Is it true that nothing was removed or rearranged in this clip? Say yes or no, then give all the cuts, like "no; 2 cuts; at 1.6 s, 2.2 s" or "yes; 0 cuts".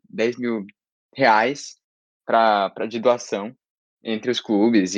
yes; 0 cuts